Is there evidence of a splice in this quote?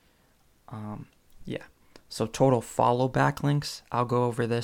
no; 0 cuts

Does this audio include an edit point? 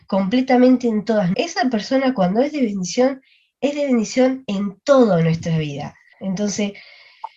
yes; 2 cuts; at 1.3 s, 6.1 s

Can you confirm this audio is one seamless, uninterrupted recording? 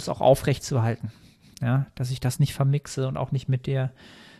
no; 1 cut; at 1.5 s

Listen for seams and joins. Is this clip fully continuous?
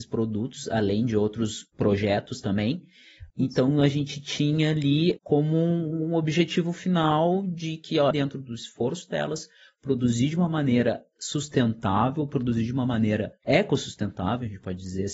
no; 3 cuts; at 3.3 s, 5.2 s, 8.1 s

